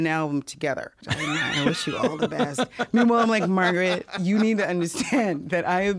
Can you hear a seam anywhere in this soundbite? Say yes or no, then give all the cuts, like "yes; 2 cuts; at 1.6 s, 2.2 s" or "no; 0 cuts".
yes; 1 cut; at 1.0 s